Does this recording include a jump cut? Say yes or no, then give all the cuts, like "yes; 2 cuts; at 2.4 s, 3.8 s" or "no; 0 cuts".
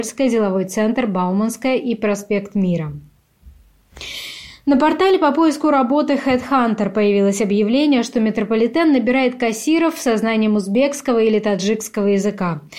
no; 0 cuts